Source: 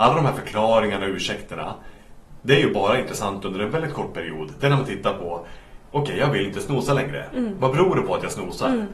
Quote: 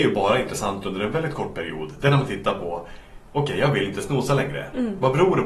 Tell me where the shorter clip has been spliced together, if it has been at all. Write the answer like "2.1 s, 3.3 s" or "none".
none